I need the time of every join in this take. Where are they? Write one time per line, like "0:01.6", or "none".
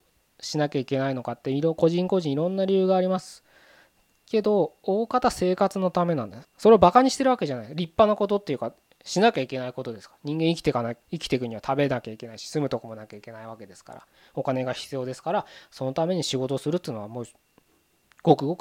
0:06.4
0:11.0